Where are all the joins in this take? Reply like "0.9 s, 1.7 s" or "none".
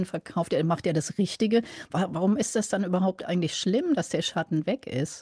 none